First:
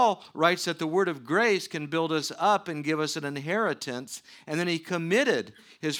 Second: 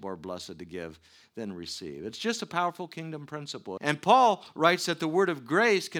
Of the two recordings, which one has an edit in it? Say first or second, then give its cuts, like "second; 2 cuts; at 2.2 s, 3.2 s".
second; 1 cut; at 3.8 s